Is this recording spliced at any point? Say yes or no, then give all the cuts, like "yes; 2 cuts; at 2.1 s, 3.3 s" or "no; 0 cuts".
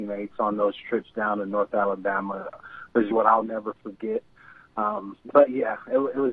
yes; 1 cut; at 3.1 s